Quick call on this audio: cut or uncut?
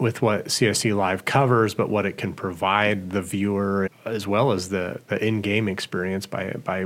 cut